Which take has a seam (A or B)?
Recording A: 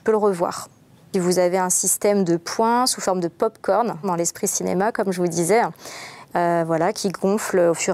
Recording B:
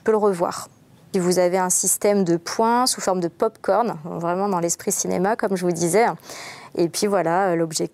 A